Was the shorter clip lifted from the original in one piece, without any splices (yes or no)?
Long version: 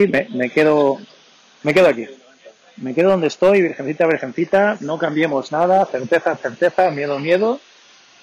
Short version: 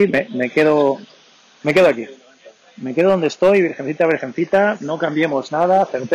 yes